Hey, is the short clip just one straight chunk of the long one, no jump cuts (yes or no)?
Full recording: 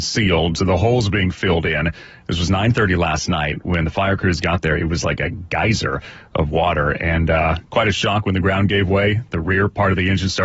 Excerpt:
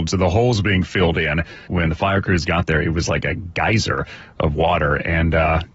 no